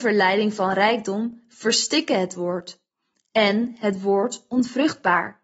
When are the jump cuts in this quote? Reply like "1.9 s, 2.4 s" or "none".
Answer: none